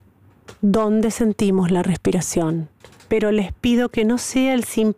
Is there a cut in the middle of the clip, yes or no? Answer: yes